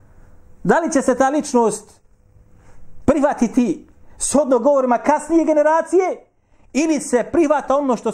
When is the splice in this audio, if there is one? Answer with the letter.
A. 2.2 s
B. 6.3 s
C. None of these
C